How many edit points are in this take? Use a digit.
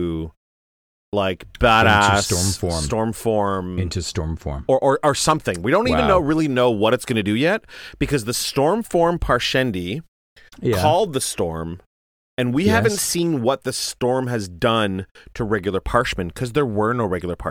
0